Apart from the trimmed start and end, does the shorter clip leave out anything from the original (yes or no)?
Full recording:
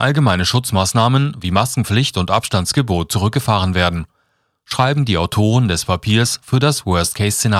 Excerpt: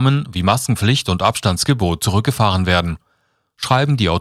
no